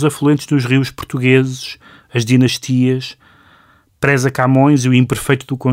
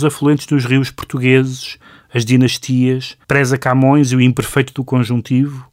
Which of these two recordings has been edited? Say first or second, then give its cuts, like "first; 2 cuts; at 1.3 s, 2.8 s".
second; 1 cut; at 3.2 s